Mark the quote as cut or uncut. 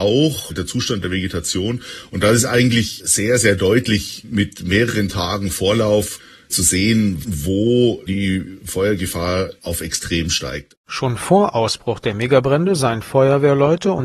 cut